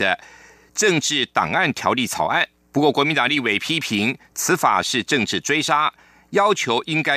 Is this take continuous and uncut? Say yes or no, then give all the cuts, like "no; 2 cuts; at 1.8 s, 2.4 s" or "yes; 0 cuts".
yes; 0 cuts